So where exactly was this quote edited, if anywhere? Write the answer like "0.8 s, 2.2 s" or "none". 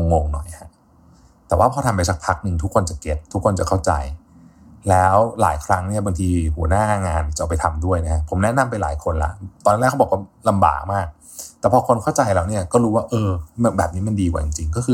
3.3 s